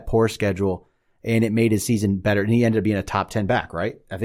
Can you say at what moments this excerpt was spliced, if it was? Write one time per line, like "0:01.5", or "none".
none

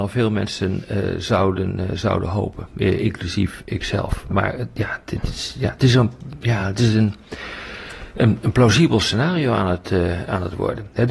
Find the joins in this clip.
none

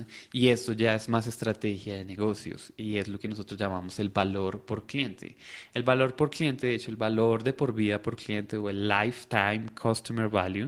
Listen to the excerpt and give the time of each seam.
none

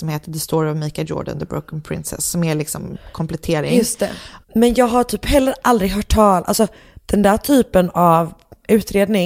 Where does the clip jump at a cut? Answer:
0:04.4

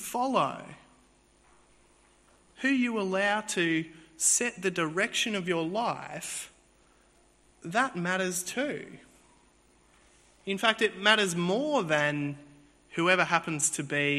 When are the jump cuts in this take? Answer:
none

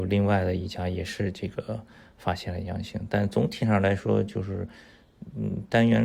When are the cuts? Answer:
none

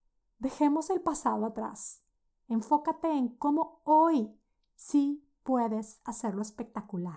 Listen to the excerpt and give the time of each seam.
none

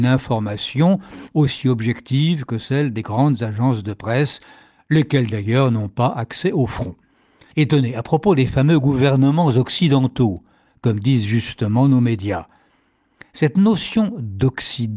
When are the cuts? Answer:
0:07.5

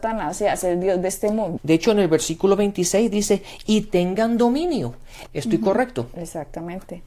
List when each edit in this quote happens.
0:01.6
0:05.3

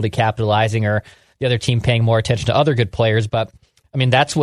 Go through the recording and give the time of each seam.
none

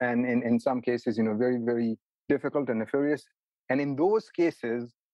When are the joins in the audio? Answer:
none

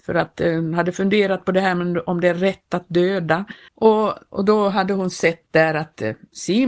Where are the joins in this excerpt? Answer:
0:03.7

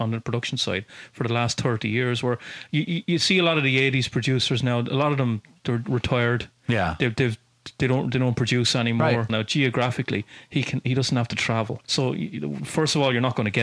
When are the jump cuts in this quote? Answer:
0:09.3
0:11.8

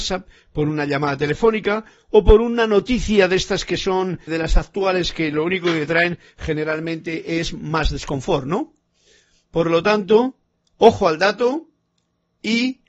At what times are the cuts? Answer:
0:04.3

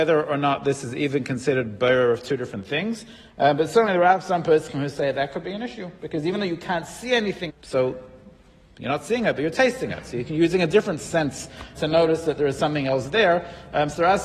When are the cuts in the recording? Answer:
0:07.5
0:11.8

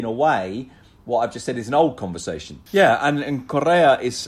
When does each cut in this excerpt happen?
0:02.7

